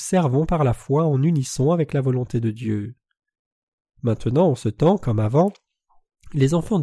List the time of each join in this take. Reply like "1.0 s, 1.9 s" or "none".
3.9 s